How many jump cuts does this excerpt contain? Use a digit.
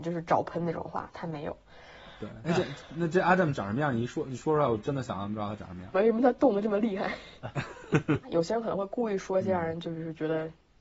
3